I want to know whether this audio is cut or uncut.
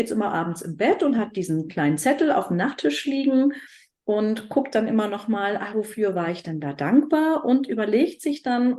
uncut